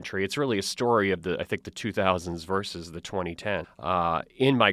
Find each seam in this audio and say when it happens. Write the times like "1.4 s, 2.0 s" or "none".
3.6 s